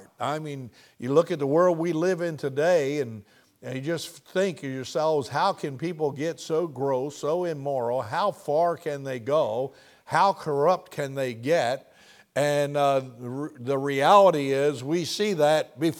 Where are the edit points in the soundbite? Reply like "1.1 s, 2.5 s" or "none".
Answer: none